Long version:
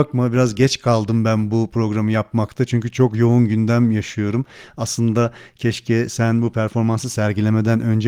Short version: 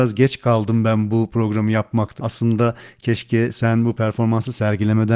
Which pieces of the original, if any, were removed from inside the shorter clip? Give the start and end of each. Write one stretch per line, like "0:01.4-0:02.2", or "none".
0:02.6-0:04.7